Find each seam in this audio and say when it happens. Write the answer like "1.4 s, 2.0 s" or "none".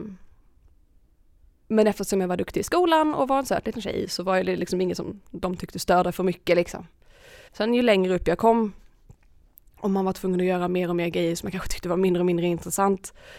7.5 s